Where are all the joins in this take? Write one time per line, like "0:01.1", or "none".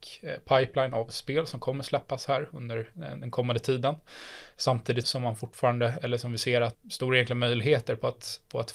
0:05.0
0:06.7